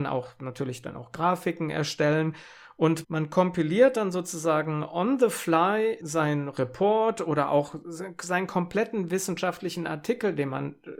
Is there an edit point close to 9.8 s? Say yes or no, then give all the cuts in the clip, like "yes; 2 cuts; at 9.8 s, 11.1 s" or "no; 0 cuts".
no; 2 cuts; at 3.0 s, 6.0 s